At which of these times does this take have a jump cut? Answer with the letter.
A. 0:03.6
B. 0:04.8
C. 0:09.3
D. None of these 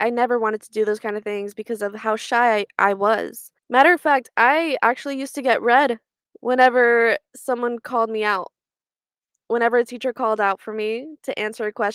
A